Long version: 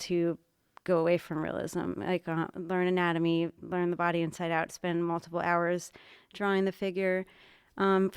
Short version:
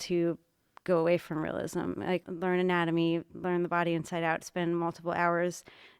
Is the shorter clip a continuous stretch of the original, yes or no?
no